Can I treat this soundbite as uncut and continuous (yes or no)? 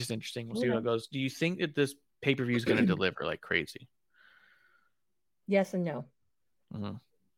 yes